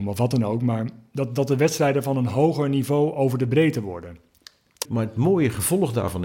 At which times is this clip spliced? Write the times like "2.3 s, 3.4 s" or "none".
4.8 s